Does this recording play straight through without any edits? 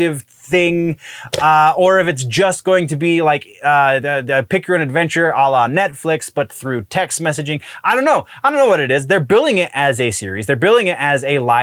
yes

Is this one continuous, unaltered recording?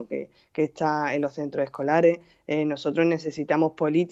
yes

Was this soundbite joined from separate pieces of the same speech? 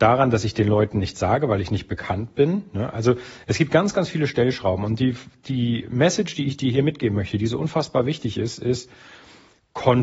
no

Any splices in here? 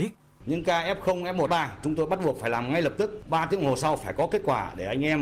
yes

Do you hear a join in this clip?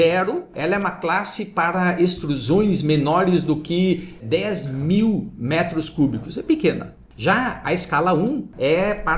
no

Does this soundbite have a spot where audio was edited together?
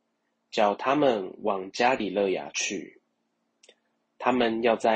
no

